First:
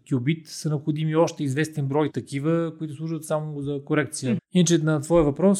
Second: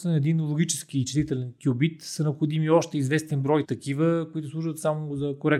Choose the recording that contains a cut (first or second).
first